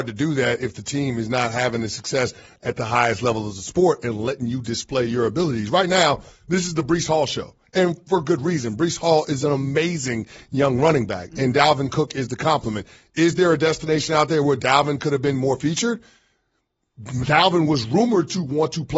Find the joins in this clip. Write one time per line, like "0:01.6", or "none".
none

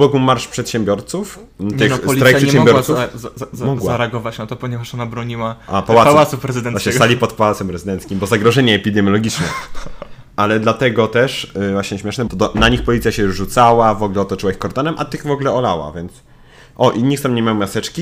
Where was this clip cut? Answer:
0:12.3

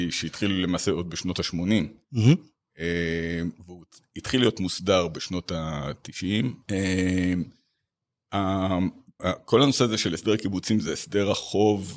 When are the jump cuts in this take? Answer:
0:06.6
0:09.2

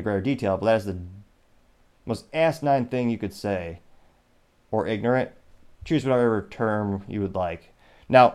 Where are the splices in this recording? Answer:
none

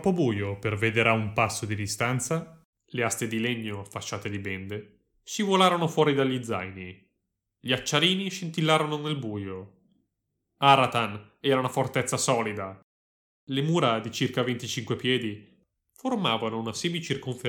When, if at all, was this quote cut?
0:02.7

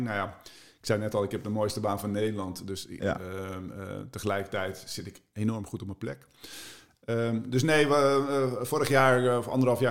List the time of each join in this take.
none

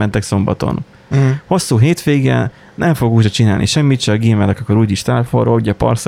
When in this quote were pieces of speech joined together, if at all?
0:01.1

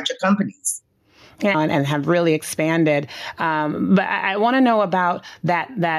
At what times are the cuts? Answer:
0:01.5

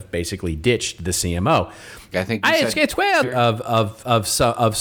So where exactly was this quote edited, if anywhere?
0:02.1
0:03.2

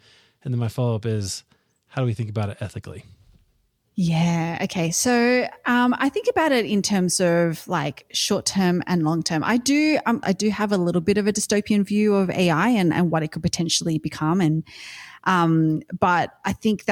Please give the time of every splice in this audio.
0:10.2

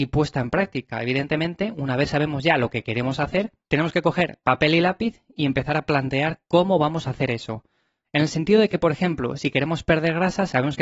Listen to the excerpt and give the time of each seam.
none

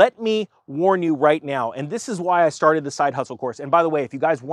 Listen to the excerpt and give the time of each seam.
none

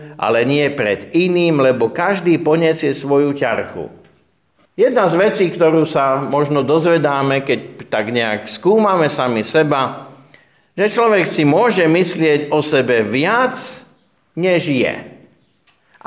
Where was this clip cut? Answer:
0:04.7

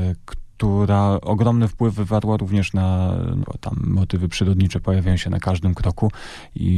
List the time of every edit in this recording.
0:03.4

